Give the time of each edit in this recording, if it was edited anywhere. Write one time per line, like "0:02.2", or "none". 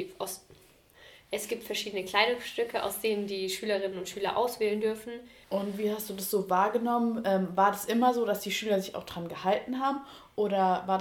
0:05.4

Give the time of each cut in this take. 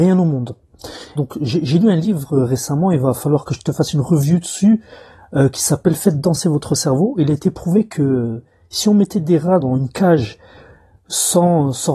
0:01.2
0:09.6

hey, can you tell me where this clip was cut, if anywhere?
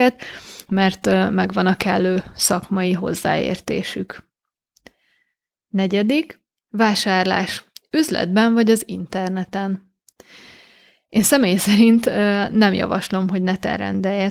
none

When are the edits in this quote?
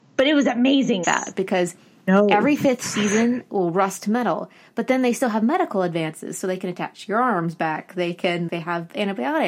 0:01.0
0:08.5

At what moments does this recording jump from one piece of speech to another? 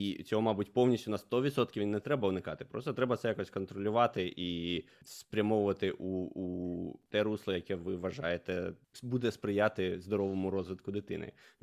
none

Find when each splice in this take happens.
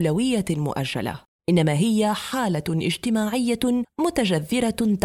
0:01.4

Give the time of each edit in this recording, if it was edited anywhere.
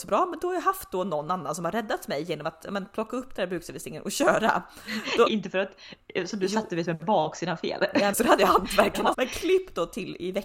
0:05.3
0:08.1
0:09.1

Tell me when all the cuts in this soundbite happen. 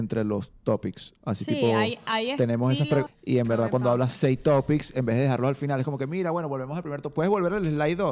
0:03.1

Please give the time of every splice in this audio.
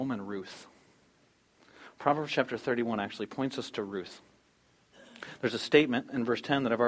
none

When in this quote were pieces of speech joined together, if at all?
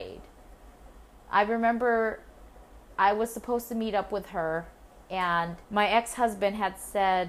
0:05.6

